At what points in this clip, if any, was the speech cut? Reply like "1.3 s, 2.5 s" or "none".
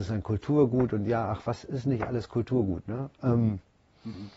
none